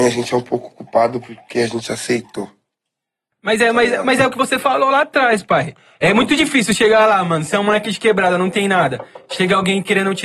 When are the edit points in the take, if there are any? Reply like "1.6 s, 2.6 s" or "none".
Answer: none